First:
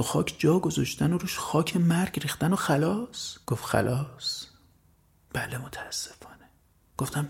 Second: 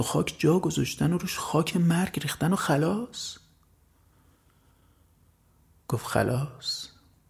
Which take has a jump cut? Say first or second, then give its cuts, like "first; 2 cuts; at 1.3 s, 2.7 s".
first; 1 cut; at 3.4 s